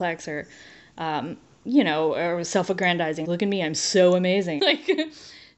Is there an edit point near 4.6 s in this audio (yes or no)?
yes